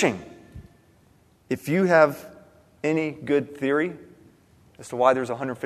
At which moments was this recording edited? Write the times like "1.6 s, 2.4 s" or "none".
1.3 s